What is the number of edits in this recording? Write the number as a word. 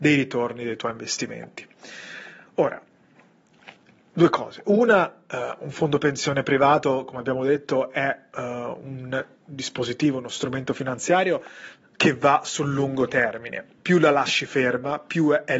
one